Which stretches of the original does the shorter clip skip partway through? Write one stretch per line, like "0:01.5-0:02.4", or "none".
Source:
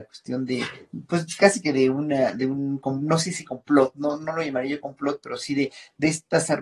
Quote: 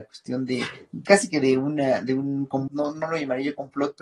0:01.1-0:01.4
0:03.0-0:03.9